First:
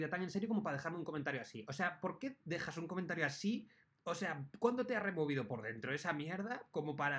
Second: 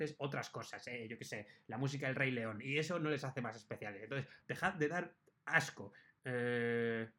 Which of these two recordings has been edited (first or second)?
second